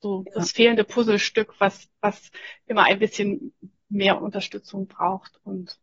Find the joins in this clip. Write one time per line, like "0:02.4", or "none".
none